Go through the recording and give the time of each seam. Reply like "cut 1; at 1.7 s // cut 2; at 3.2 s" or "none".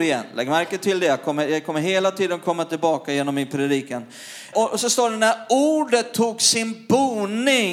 cut 1; at 4.5 s